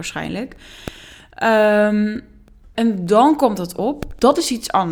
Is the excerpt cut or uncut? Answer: cut